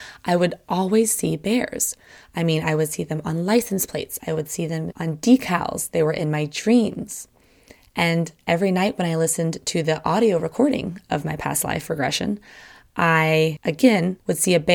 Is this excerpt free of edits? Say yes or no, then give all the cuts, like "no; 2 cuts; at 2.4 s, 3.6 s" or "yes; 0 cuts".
yes; 0 cuts